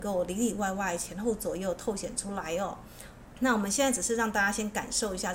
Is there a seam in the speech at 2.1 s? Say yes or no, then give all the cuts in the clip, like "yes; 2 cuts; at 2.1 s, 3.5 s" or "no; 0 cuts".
no; 1 cut; at 3.3 s